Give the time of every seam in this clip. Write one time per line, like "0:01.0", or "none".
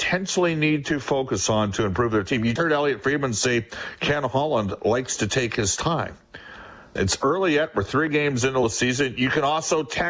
0:02.6
0:07.0